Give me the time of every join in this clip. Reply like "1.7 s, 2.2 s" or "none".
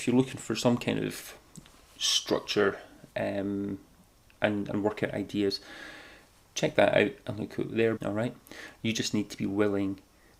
8.0 s